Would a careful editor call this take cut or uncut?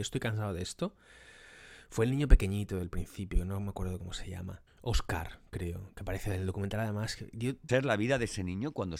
cut